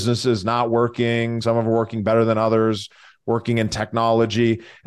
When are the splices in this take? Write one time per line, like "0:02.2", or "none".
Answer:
0:01.4